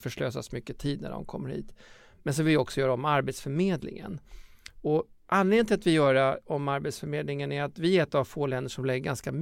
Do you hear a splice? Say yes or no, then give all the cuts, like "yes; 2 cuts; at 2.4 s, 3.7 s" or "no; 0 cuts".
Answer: no; 0 cuts